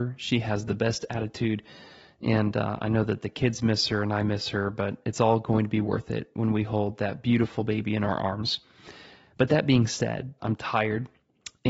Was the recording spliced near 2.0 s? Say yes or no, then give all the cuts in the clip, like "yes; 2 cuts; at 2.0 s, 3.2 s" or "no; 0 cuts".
no; 1 cut; at 10.4 s